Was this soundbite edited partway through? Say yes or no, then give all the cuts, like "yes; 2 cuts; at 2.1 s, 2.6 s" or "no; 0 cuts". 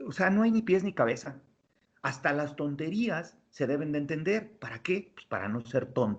yes; 1 cut; at 1.9 s